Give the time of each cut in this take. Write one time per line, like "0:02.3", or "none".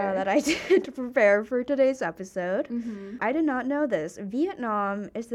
0:03.2